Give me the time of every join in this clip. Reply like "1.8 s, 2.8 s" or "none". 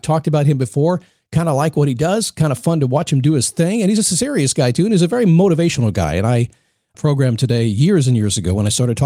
6.9 s